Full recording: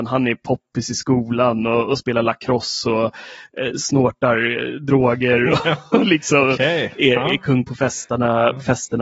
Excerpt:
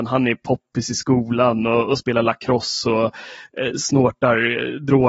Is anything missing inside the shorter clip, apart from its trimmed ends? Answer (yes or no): no